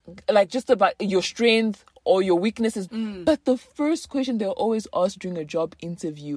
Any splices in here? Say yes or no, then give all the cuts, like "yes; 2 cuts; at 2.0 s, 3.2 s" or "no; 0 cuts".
yes; 1 cut; at 2.9 s